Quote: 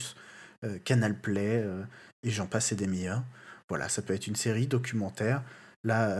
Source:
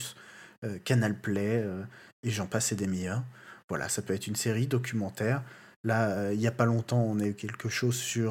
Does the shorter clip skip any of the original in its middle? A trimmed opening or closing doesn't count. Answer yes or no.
no